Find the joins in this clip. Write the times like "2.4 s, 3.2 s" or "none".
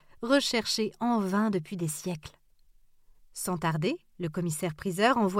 3.2 s